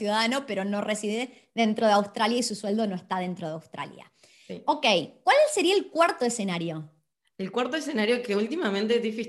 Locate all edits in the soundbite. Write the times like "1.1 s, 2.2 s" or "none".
none